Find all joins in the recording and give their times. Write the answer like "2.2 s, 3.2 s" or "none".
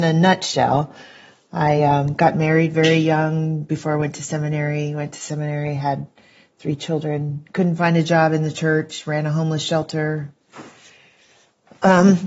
none